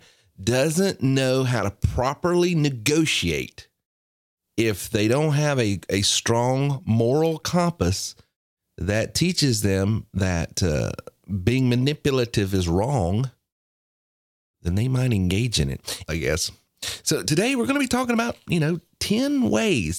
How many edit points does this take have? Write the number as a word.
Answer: one